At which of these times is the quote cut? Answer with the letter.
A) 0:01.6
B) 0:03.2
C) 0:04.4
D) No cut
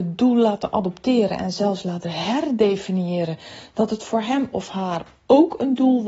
D